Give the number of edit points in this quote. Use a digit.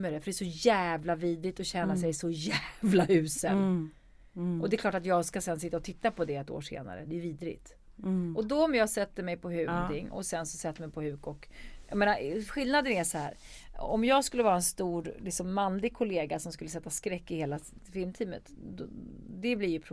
1